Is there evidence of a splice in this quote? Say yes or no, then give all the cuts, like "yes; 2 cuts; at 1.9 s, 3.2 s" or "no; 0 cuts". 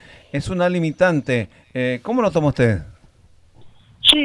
no; 0 cuts